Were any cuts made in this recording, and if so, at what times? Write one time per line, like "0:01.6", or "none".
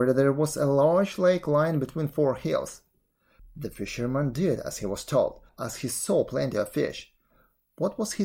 0:03.4
0:05.5